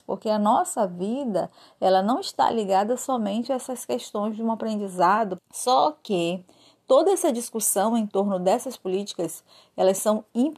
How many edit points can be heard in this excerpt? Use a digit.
1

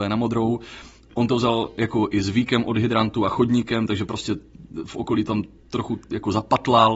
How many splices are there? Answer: 0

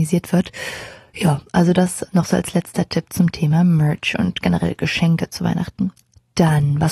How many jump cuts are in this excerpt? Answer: 1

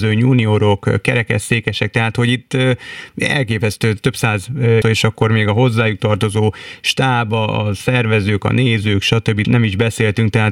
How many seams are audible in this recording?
3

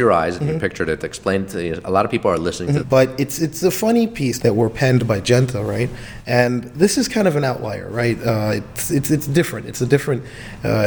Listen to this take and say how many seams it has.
2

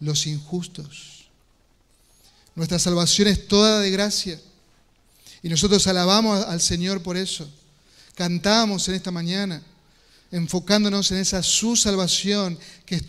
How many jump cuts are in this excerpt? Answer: 0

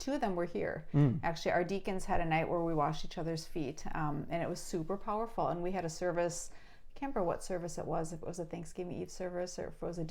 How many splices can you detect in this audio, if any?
0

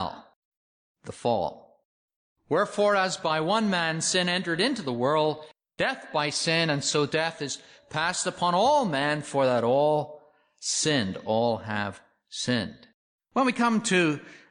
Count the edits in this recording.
0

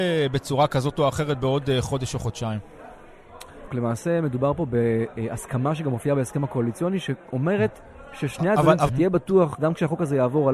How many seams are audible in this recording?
2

